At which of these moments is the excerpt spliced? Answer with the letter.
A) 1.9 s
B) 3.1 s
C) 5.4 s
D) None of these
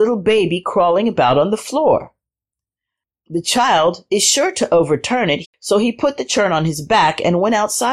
C